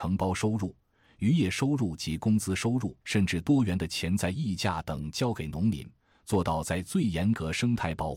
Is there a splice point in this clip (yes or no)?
yes